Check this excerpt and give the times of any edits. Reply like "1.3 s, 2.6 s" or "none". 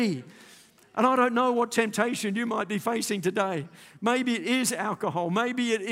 none